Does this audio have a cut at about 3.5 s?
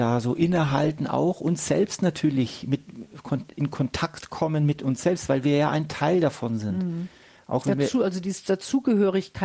no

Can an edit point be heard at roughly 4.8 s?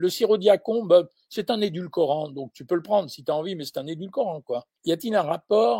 yes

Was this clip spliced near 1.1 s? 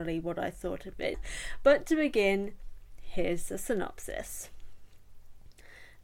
yes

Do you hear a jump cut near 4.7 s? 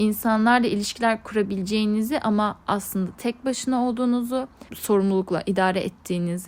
yes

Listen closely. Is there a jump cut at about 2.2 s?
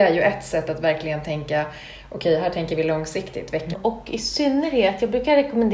no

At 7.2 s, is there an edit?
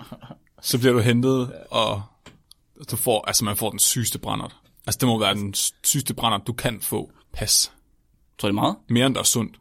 yes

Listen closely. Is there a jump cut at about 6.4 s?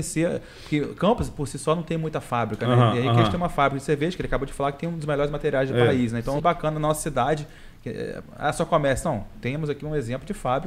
yes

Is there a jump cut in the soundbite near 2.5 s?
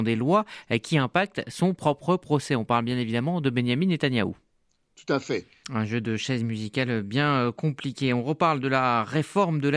no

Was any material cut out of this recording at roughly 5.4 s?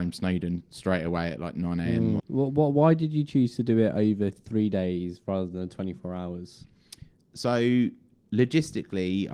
no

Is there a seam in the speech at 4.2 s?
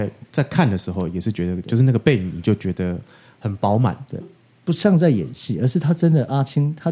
yes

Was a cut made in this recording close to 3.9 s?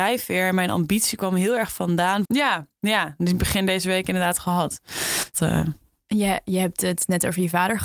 no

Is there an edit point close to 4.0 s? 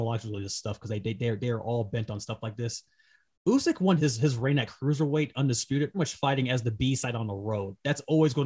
yes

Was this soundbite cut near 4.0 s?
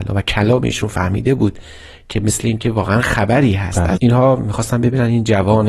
yes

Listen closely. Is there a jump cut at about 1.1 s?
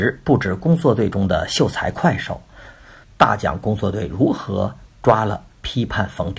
no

